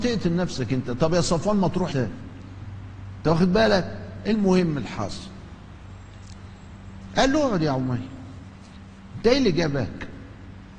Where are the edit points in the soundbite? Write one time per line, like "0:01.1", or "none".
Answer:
0:01.9

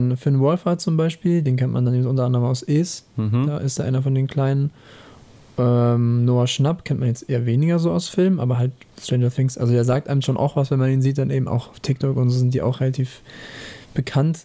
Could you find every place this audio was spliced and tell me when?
none

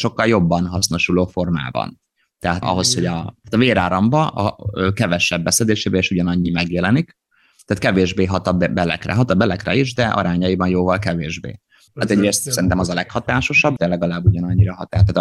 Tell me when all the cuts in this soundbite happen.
0:02.6
0:11.9
0:13.8

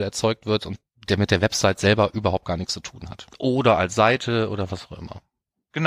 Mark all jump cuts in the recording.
0:03.3

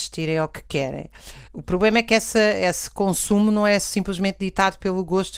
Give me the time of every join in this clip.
none

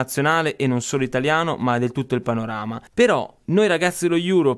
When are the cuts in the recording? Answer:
0:02.9

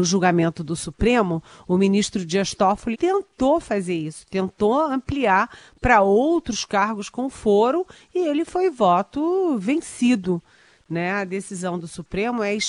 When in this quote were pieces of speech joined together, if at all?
0:02.9

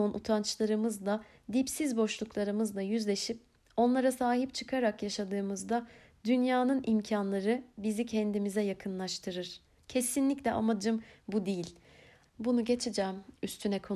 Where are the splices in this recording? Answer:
0:09.8
0:12.2

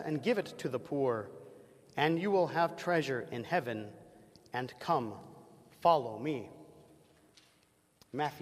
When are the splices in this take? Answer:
none

